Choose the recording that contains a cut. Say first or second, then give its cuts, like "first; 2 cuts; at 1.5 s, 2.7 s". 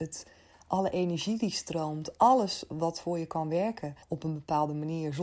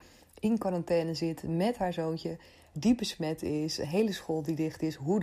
first; 1 cut; at 4.0 s